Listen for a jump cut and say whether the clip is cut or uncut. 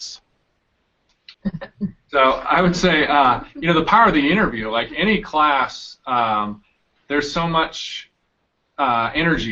cut